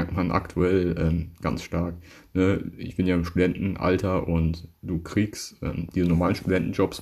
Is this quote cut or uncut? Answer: uncut